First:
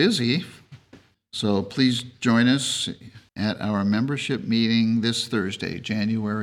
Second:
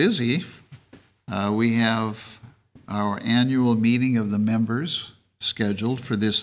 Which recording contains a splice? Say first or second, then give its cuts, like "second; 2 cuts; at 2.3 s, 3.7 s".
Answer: first; 2 cuts; at 1.1 s, 3.3 s